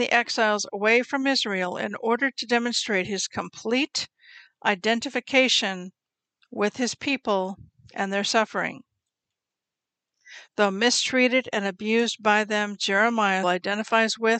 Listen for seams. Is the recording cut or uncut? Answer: cut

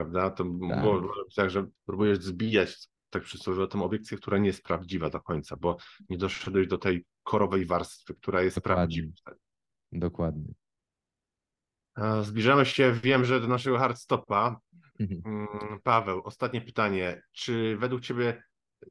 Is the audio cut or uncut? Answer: cut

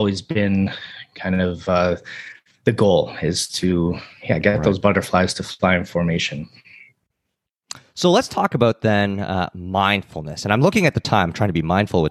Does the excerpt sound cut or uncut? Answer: uncut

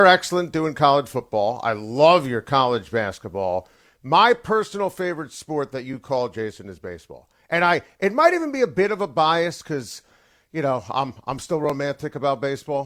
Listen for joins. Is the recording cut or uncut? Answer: uncut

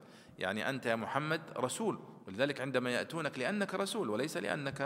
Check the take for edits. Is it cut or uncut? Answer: cut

